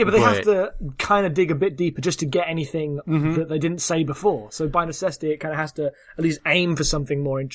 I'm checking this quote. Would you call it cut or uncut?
uncut